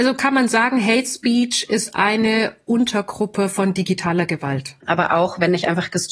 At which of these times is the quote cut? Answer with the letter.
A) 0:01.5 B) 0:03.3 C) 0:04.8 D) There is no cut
C